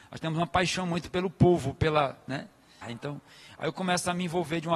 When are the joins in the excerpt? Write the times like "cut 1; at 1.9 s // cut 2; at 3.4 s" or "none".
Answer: cut 1; at 2.8 s